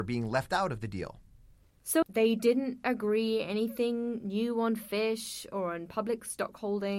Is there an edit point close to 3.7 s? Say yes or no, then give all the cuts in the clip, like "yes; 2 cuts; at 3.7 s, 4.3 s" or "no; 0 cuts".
no; 1 cut; at 2.0 s